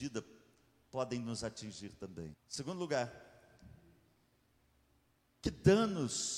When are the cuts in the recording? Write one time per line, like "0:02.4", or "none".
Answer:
0:02.3